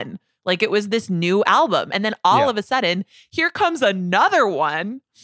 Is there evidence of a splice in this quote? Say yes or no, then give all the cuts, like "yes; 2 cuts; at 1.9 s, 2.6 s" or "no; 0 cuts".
no; 0 cuts